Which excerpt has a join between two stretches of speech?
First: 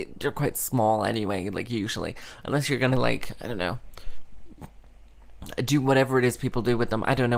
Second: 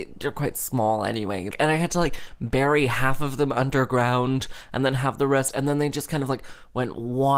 second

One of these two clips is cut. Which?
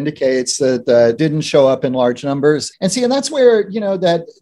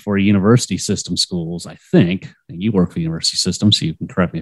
first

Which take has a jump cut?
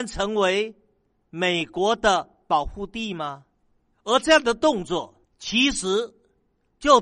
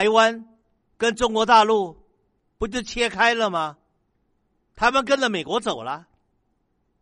first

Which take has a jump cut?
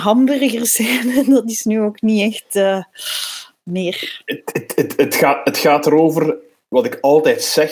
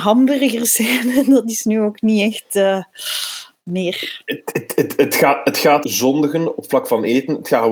second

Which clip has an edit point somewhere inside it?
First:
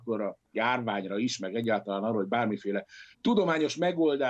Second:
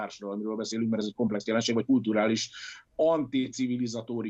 first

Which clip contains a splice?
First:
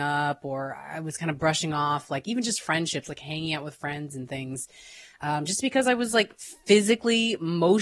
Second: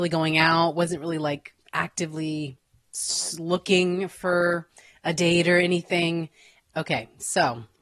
second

